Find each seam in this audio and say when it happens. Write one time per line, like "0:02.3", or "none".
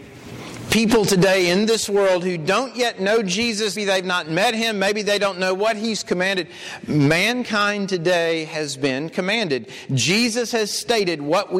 0:03.8